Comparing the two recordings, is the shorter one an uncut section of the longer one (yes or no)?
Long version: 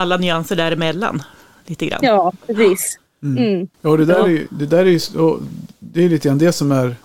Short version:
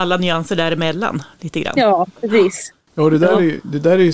no